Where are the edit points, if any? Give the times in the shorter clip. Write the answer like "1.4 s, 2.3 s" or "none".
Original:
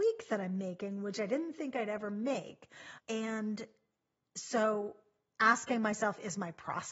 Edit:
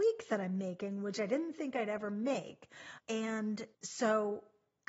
3.7 s